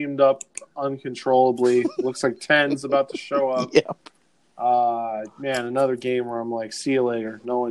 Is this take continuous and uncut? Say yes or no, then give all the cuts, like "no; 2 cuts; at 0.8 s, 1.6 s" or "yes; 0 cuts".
yes; 0 cuts